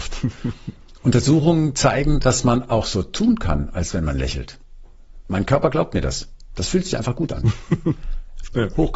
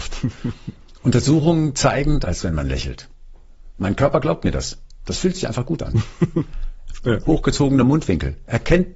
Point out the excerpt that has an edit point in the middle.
second; 1 cut; at 2.2 s

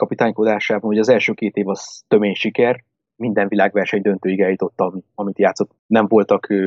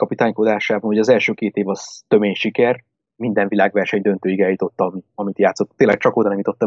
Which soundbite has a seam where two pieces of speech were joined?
first; 1 cut; at 5.8 s

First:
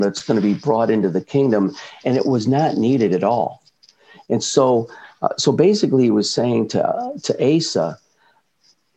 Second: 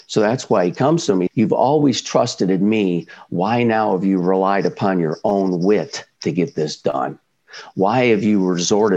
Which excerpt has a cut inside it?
second; 1 cut; at 1.3 s

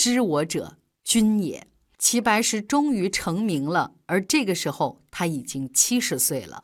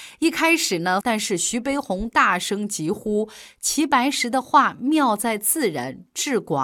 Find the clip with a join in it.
second; 1 cut; at 1.0 s

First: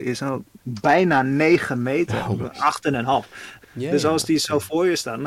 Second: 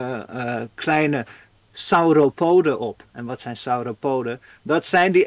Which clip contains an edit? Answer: first; 2 cuts; at 2.4 s, 3.6 s

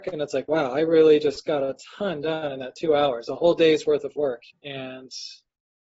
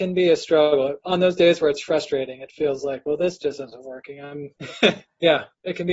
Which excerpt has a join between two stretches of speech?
first; 1 cut; at 4.5 s

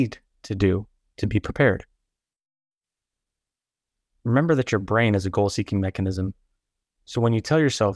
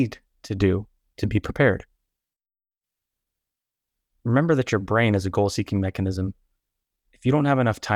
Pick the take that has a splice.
second; 1 cut; at 6.9 s

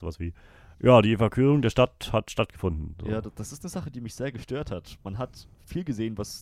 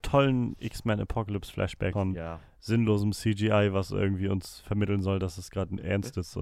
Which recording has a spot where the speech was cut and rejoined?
second; 1 cut; at 1.9 s

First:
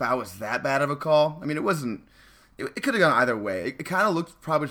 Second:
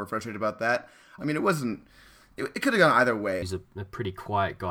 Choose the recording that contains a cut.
second; 2 cuts; at 1.2 s, 3.4 s

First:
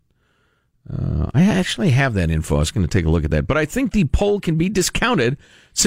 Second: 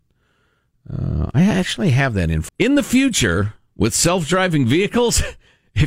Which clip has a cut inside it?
second; 1 cut; at 2.5 s

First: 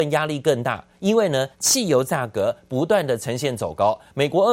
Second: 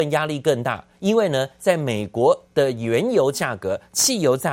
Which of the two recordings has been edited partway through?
first; 1 cut; at 1.5 s

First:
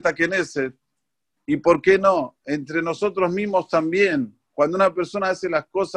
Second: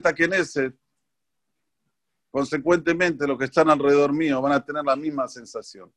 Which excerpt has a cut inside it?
first; 1 cut; at 1.4 s

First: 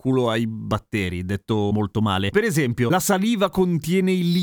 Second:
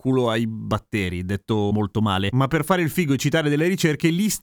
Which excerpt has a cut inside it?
first; 1 cut; at 2.3 s

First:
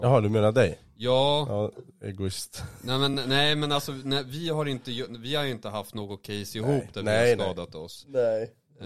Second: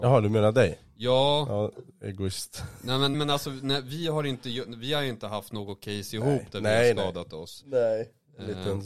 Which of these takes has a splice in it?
second; 1 cut; at 3.1 s

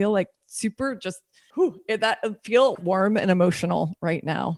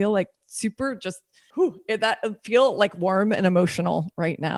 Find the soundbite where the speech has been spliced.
first; 1 cut; at 2.7 s

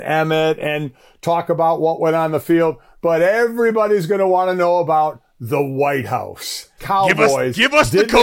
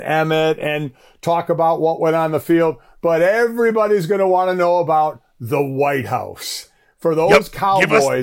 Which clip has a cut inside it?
first; 1 cut; at 6.8 s

